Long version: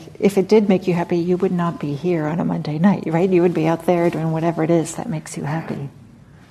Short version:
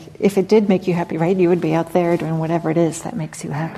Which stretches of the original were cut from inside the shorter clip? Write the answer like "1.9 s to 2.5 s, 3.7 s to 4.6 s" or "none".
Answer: 1.1 s to 3.0 s